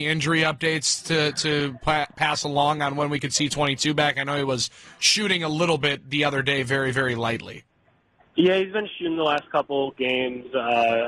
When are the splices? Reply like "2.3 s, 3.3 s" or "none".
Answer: none